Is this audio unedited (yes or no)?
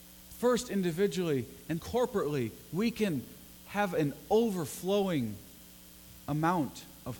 no